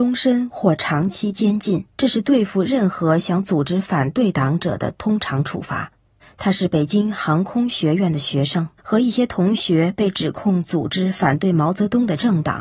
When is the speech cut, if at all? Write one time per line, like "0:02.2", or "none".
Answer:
0:01.9
0:06.2
0:08.8